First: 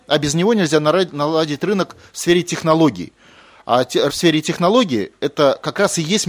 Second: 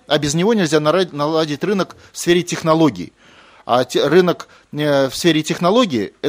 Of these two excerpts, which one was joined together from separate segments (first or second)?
first